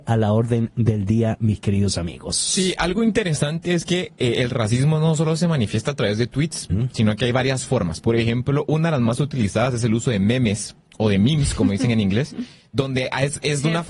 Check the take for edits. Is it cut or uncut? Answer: cut